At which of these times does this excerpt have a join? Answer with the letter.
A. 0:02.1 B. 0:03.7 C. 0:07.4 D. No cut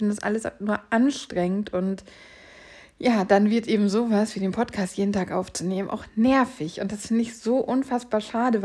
D